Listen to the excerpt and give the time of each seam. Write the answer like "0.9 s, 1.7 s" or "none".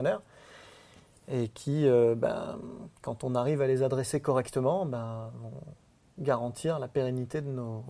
none

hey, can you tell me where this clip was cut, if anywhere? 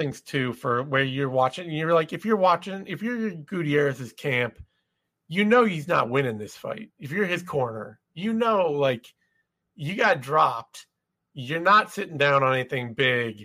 none

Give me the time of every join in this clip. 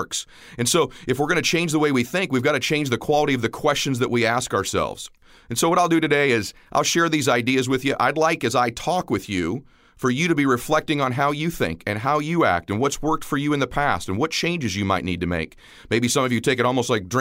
15.8 s

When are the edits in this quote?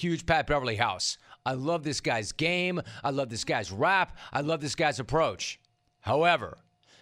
3.0 s

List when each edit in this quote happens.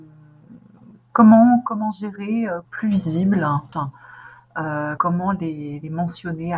2.6 s, 3.7 s, 5.0 s

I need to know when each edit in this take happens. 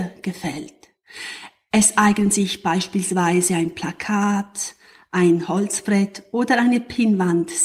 none

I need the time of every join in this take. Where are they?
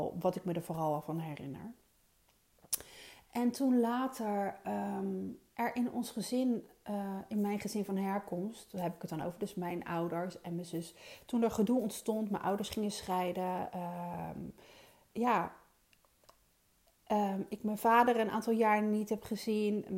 none

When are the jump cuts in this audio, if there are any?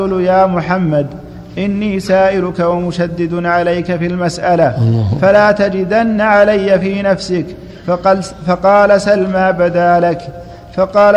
none

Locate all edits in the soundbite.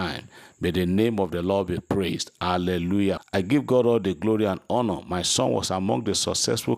3.2 s

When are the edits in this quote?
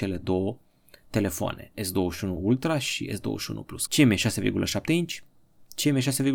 3.9 s

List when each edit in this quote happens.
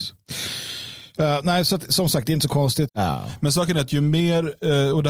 2.9 s

